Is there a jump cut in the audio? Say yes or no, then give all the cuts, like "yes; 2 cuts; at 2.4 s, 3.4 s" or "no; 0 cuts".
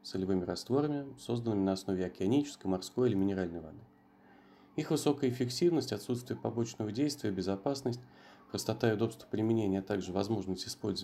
no; 0 cuts